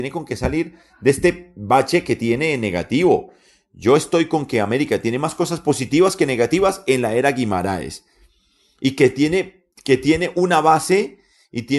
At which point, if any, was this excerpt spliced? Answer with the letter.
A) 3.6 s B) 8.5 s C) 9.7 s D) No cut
C